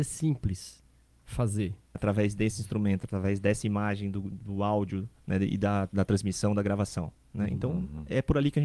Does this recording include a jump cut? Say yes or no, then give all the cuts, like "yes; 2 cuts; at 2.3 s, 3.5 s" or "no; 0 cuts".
yes; 1 cut; at 1.9 s